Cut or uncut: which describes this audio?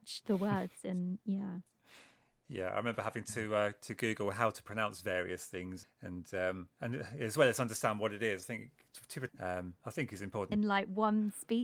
cut